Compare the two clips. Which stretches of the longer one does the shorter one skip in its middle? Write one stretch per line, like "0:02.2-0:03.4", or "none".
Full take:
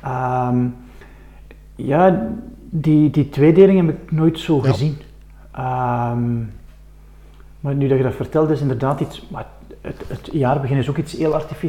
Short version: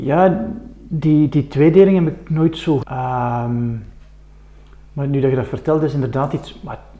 0:04.6-0:05.5

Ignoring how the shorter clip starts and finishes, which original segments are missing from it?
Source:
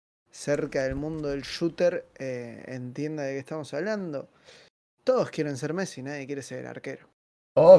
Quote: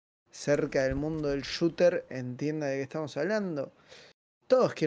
0:02.1-0:02.6

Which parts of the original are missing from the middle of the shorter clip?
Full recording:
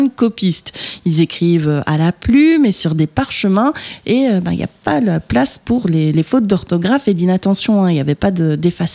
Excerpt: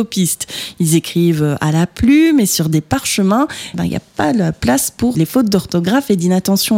0:04.0-0:04.4
0:05.8-0:06.1

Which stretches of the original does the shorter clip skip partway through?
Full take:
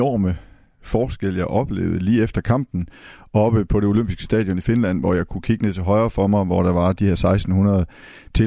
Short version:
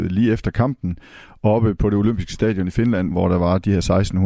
0:05.0-0:06.4

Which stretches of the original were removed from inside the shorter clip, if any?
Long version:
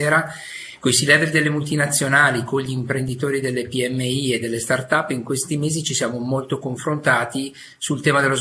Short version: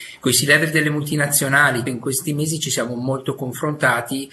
0:02.4-0:05.1

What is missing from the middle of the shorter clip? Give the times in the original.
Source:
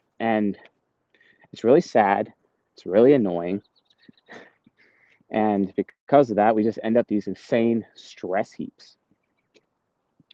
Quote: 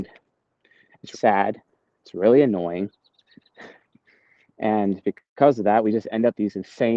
0:01.6-0:01.8

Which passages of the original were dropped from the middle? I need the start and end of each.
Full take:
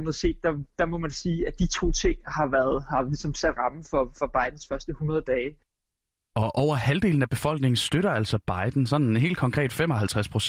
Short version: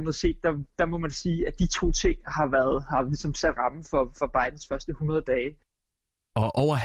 none

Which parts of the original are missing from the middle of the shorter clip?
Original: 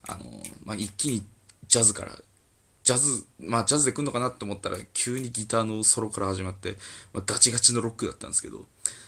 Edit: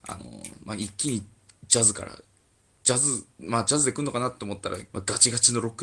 0:04.9-0:07.1

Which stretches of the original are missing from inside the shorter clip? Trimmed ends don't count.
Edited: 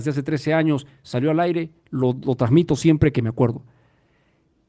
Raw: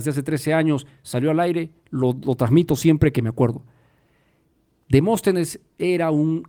none

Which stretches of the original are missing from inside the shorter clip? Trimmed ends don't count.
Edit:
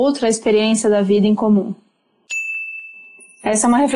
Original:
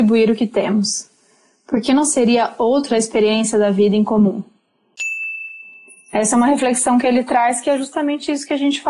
none

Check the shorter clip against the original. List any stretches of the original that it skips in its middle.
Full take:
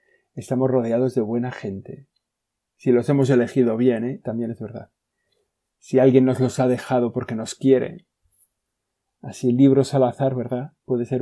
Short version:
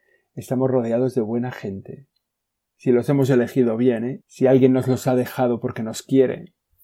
0:04.2-0:05.7

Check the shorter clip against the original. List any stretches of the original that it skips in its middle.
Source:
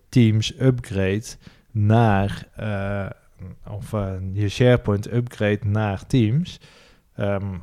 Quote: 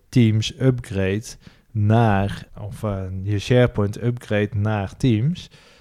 0:02.5-0:03.6

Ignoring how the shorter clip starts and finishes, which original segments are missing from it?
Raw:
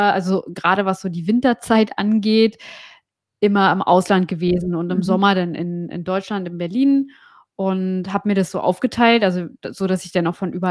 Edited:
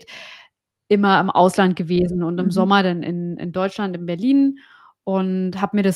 none

